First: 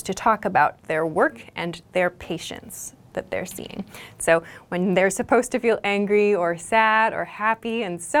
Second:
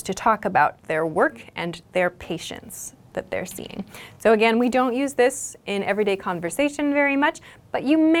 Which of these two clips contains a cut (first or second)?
first